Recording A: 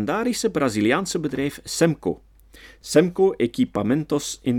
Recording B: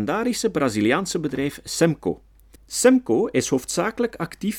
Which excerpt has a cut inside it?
B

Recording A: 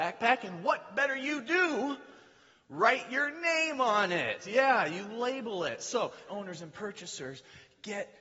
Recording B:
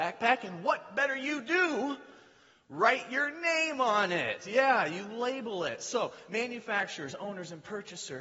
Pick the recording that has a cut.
A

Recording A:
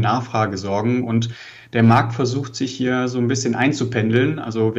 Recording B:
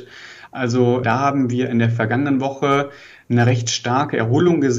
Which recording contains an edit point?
B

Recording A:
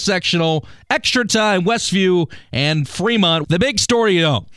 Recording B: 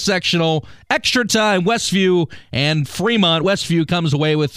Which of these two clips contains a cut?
A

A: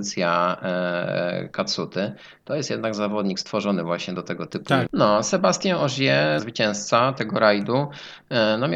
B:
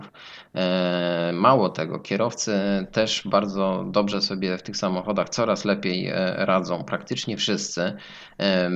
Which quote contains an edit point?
A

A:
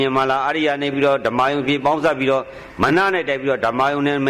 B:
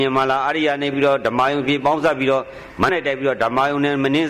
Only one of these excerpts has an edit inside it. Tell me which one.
B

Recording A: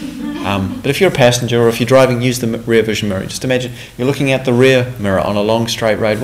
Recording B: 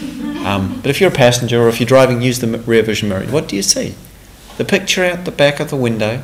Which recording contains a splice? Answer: B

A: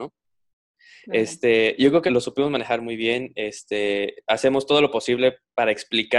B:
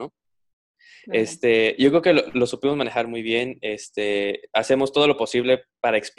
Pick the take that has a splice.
A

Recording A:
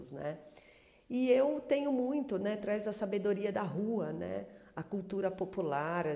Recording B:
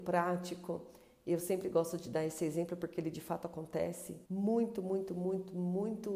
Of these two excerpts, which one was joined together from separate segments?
B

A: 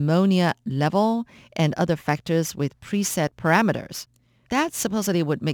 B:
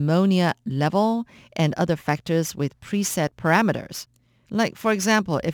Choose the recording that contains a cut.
A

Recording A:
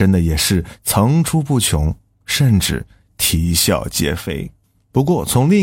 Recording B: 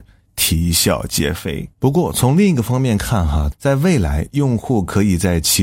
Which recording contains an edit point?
B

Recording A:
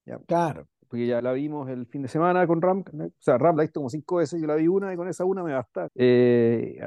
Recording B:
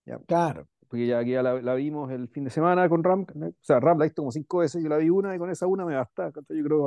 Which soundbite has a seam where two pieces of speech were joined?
A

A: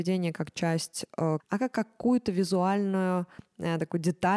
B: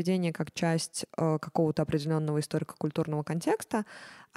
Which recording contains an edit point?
A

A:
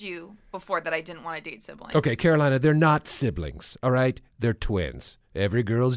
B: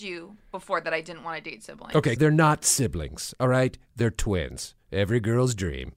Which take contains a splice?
B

